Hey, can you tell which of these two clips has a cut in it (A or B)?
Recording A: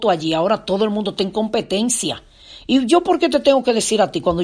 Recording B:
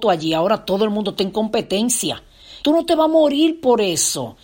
B